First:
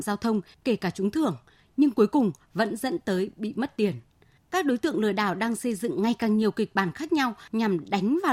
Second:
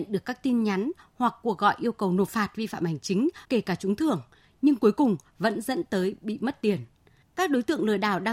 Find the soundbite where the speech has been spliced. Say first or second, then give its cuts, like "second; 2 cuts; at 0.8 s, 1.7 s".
second; 1 cut; at 3.4 s